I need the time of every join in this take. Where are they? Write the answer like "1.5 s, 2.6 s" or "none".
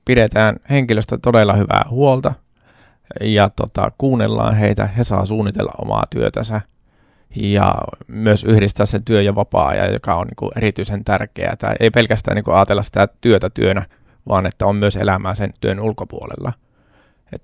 none